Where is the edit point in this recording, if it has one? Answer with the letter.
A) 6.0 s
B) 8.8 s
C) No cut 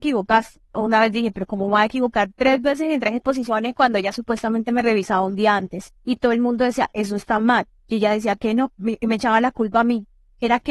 B